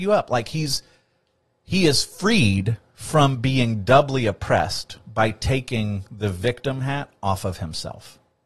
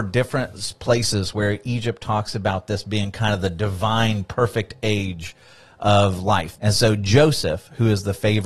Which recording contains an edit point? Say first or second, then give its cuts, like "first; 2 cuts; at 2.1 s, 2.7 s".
second; 1 cut; at 6.6 s